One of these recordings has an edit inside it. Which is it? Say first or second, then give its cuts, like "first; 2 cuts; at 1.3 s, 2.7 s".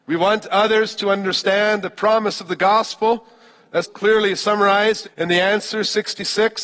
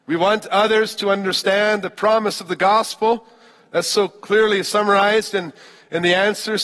first; 2 cuts; at 3.8 s, 5.0 s